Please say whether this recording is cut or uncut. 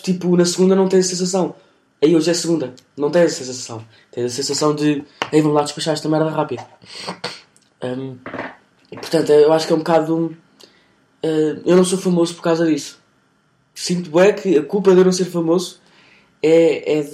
uncut